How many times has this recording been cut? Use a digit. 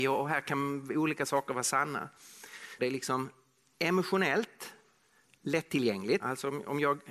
2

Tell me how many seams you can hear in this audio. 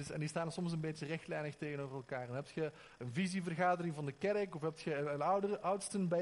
0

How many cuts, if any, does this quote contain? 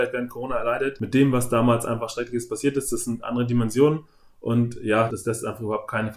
1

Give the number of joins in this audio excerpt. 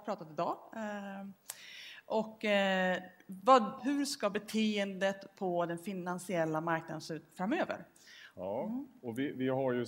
2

